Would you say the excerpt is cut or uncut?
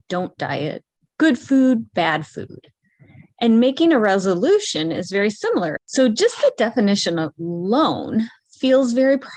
cut